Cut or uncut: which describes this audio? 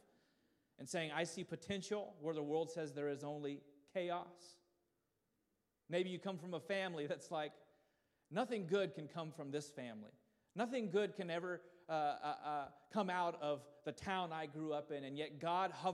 uncut